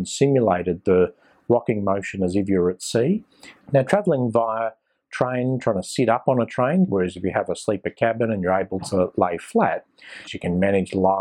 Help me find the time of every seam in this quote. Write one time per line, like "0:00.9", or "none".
0:03.6
0:06.9
0:10.3